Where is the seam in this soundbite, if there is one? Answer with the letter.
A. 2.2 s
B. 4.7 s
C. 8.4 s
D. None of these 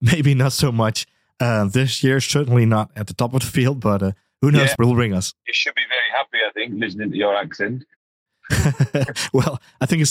B